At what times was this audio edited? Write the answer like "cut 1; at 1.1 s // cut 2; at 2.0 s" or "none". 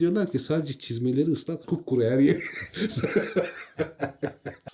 cut 1; at 1.6 s